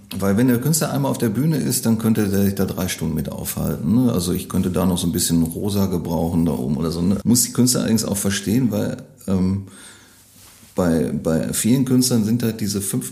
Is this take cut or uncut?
cut